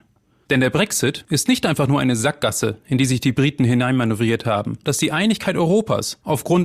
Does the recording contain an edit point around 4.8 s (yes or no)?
yes